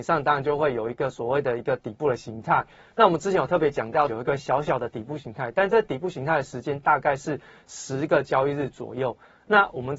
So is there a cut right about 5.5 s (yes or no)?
no